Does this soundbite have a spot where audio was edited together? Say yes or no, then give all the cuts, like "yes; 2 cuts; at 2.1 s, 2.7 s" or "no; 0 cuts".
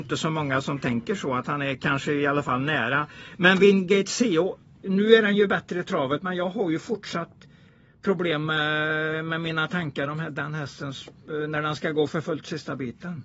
no; 0 cuts